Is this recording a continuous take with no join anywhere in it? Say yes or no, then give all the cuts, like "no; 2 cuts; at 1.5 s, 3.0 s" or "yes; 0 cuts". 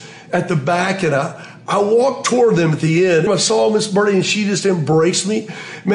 no; 1 cut; at 3.3 s